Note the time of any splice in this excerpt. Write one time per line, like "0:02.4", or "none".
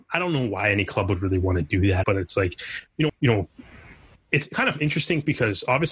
0:02.0
0:03.1